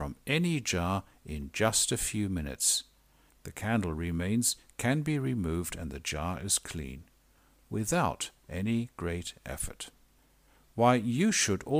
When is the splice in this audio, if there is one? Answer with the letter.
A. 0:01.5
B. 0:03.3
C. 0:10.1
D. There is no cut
B